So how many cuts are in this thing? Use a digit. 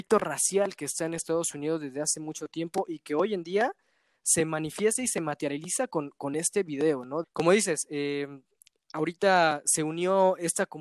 1